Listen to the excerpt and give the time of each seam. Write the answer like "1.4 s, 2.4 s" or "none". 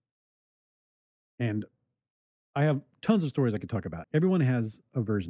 4.0 s